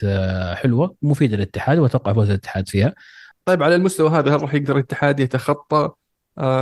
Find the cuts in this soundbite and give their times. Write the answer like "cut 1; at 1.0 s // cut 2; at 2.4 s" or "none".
cut 1; at 3.3 s